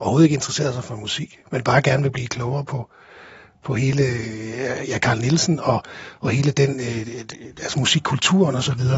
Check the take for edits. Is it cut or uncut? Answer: uncut